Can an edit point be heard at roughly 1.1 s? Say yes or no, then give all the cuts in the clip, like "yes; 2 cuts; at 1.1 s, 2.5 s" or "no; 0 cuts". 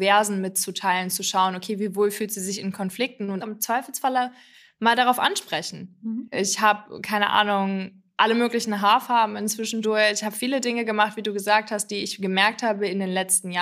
no; 3 cuts; at 3.4 s, 6.3 s, 9.8 s